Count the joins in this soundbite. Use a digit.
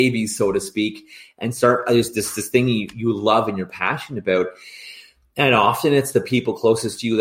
0